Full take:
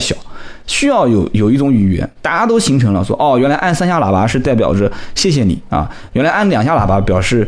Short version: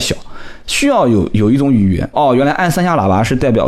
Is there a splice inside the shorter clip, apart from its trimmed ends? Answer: yes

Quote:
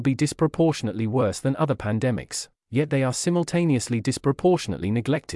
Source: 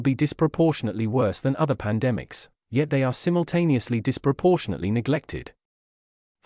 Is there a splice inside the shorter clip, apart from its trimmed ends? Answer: no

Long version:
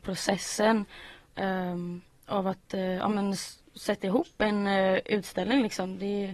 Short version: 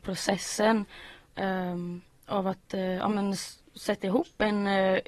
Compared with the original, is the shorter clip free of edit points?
yes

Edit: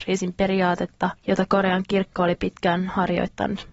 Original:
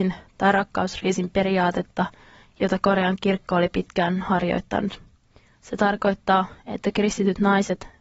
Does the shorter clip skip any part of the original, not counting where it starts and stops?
yes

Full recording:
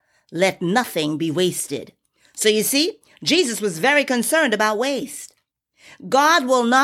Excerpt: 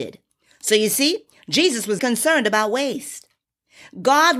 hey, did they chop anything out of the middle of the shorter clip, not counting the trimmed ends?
yes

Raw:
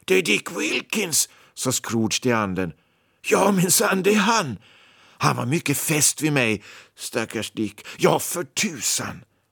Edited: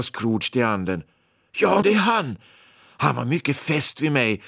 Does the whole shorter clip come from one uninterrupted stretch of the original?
no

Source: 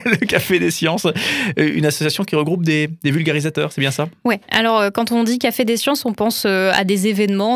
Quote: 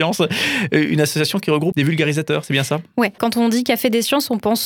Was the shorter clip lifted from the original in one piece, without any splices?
no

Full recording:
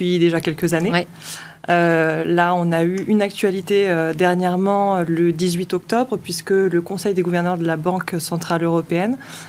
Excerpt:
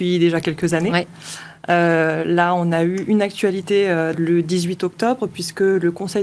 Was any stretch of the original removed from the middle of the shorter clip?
yes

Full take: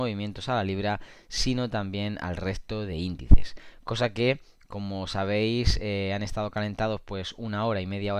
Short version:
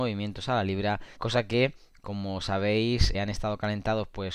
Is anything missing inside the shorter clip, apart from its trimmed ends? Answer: yes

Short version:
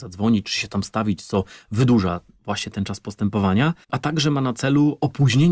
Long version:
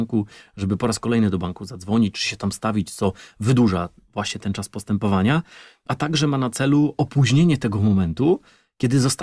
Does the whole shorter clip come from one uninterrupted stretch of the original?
no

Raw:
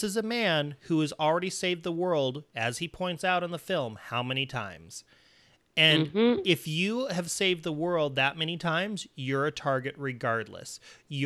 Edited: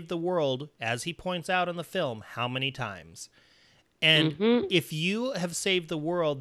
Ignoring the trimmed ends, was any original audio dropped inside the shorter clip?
no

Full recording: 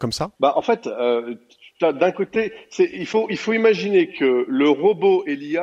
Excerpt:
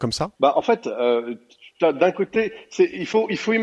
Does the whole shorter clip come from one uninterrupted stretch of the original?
yes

